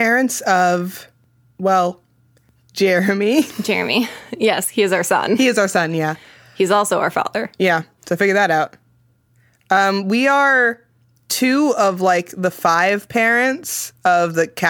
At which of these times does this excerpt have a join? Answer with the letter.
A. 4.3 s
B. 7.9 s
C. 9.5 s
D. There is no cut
D